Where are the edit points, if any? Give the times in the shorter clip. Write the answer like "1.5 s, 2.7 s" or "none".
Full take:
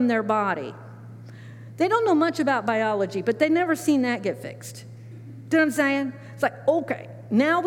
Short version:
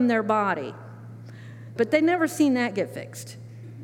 1.8 s